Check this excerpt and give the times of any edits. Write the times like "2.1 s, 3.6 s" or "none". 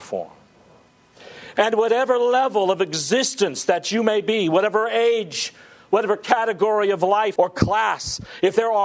1.6 s, 7.4 s